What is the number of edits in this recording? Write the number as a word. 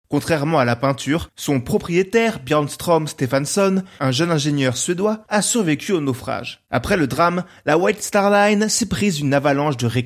one